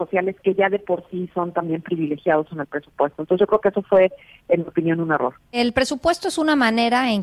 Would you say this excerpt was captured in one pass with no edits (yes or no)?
yes